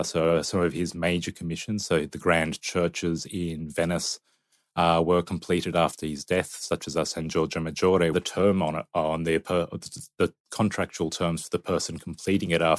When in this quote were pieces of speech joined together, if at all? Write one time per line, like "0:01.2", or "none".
0:08.1